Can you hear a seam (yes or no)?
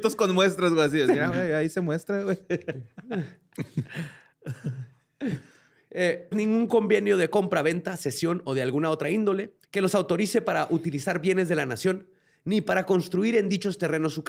yes